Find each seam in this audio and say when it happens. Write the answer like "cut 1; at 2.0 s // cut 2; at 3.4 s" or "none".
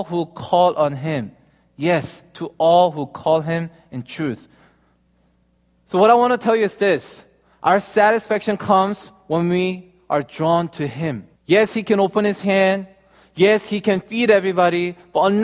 cut 1; at 11.4 s